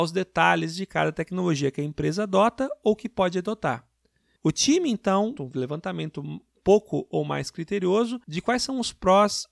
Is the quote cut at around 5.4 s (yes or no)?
yes